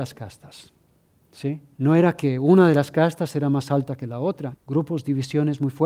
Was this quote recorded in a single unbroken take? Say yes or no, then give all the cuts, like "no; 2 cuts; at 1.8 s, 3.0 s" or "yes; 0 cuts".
no; 2 cuts; at 1.8 s, 4.5 s